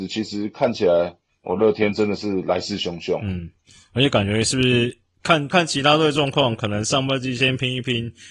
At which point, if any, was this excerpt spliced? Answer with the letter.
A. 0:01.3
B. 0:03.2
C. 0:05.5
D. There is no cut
C